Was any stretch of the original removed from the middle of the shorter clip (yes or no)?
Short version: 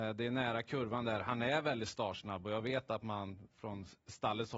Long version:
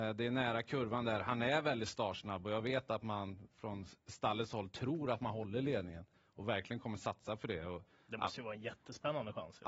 no